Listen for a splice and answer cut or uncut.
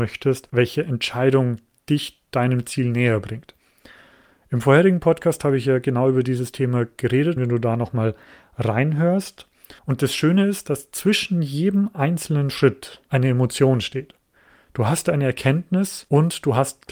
cut